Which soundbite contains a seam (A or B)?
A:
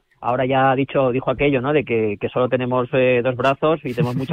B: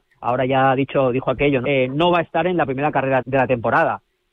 B